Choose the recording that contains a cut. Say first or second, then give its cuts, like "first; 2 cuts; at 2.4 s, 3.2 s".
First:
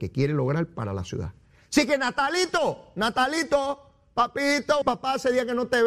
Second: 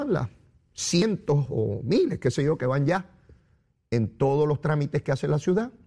first; 1 cut; at 4.8 s